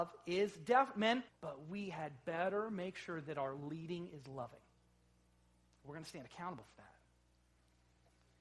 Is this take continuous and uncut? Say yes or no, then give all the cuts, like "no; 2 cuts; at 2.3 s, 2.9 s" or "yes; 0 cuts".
no; 1 cut; at 1.3 s